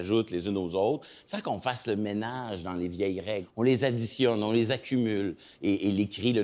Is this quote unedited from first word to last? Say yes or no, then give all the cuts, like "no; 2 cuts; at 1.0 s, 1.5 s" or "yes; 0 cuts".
yes; 0 cuts